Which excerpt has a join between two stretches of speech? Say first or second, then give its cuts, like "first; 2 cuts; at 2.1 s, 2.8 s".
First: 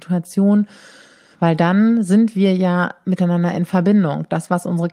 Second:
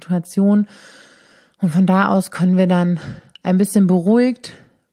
first; 1 cut; at 1.3 s